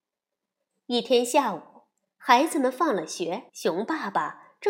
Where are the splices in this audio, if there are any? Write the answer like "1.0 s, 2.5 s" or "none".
3.5 s